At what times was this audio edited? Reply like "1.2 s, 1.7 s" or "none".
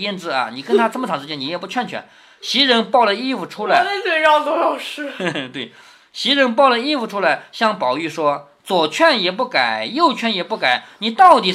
none